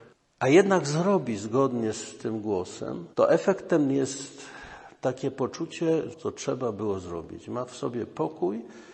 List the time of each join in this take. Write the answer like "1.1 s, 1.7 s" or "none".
3.1 s, 6.1 s